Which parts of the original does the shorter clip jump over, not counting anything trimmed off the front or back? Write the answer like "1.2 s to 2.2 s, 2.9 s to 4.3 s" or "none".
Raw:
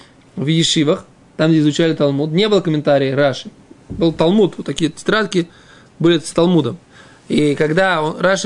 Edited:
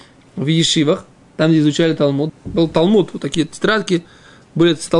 2.3 s to 3.7 s